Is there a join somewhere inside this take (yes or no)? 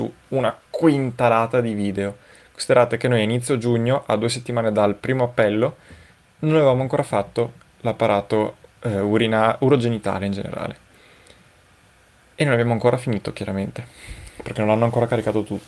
no